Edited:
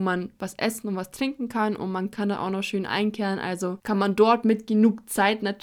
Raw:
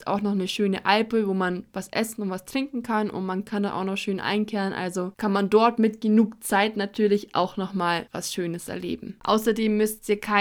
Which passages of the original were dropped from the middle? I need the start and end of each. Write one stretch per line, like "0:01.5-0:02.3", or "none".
none